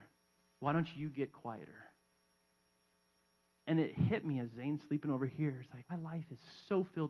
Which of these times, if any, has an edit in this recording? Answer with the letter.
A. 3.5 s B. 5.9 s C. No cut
B